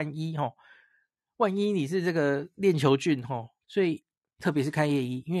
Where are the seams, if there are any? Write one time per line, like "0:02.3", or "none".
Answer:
0:03.6

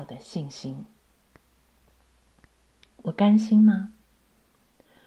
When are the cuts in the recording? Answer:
none

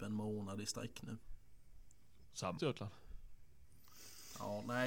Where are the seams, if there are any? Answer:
0:02.6

